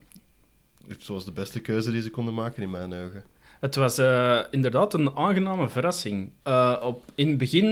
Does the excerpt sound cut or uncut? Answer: cut